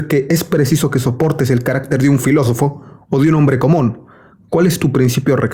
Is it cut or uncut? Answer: uncut